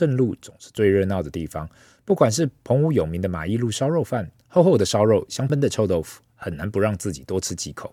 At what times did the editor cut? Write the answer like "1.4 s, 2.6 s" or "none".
5.5 s